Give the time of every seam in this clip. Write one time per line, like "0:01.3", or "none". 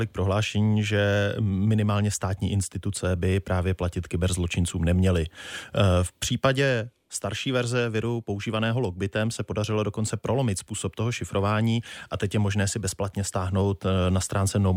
none